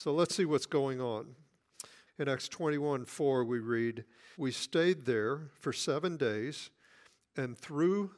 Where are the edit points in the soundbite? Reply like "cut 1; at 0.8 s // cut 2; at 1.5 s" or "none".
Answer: cut 1; at 2.1 s // cut 2; at 4.3 s